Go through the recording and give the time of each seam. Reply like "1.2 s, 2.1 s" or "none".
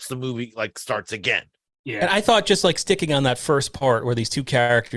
none